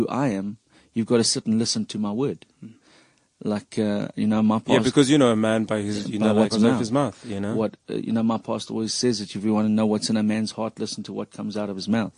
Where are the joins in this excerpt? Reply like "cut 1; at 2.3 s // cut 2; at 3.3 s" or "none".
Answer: cut 1; at 6.5 s